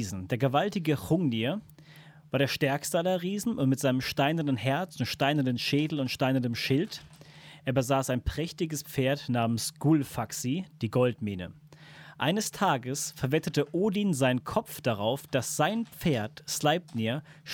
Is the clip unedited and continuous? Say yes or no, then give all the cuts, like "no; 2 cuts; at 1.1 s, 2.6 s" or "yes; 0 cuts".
yes; 0 cuts